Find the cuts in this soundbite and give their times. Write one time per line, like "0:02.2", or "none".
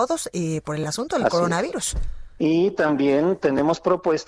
0:02.4